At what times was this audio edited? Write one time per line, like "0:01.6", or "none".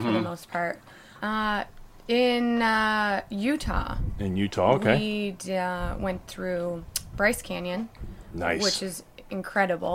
0:01.2